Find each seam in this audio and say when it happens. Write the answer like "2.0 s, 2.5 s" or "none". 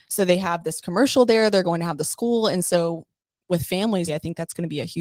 4.1 s